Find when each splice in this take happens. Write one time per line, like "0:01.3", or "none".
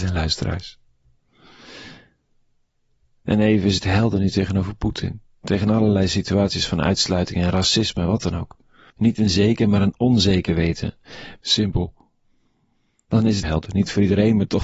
0:08.9
0:11.4
0:13.4